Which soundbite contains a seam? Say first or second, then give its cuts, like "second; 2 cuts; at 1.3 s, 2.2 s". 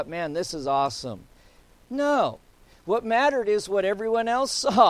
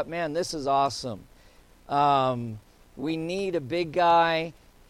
first; 1 cut; at 1.8 s